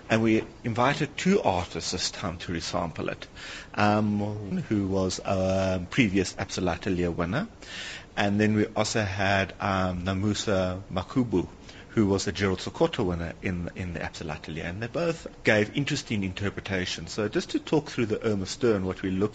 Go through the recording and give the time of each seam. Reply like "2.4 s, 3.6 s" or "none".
4.5 s